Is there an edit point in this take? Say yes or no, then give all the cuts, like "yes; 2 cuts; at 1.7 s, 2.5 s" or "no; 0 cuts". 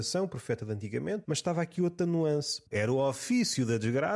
yes; 2 cuts; at 1.2 s, 2.7 s